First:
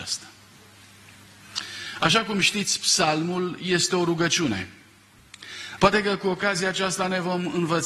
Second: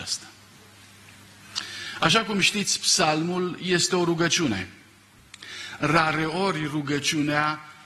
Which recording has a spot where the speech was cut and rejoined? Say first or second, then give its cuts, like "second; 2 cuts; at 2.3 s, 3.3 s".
first; 1 cut; at 5.8 s